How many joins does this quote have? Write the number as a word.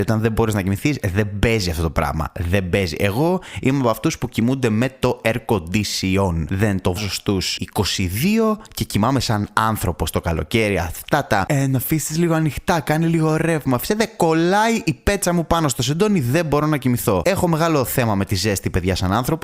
one